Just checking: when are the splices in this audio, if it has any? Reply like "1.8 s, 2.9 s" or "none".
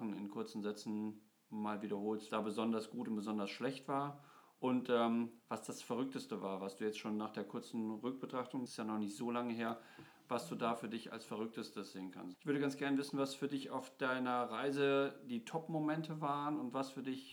2.3 s, 8.7 s, 12.3 s